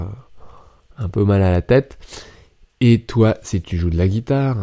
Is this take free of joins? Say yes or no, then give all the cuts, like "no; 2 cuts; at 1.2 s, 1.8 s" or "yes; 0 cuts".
yes; 0 cuts